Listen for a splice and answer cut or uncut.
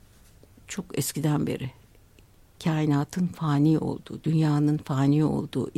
uncut